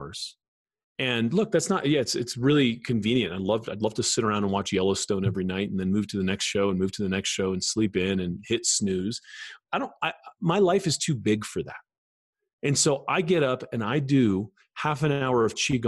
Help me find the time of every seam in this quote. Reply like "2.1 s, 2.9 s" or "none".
none